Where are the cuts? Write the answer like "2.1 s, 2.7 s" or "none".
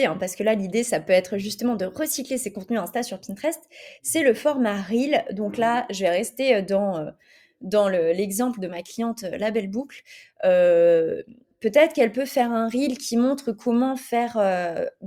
none